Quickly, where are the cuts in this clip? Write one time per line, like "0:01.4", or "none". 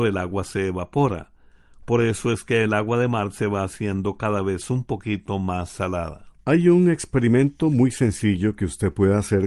none